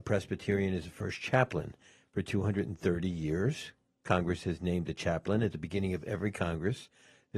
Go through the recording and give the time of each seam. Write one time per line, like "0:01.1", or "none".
none